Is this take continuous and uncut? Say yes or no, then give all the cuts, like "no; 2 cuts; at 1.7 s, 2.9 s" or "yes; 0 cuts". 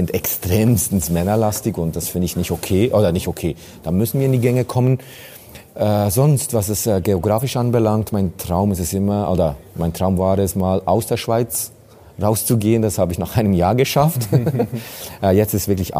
yes; 0 cuts